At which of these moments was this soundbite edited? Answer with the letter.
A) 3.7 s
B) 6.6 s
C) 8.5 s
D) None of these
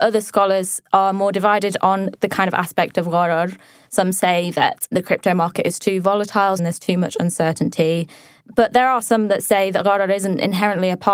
B